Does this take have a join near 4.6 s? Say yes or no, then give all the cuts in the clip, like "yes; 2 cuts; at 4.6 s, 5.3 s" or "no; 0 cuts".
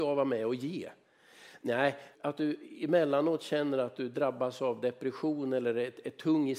no; 1 cut; at 2.1 s